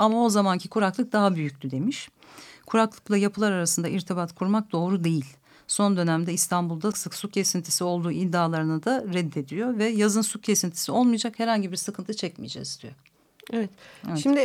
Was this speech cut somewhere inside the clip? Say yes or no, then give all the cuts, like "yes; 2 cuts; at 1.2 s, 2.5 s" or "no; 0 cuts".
yes; 1 cut; at 6.9 s